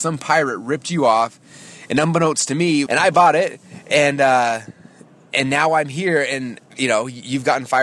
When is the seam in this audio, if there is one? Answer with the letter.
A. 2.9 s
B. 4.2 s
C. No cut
A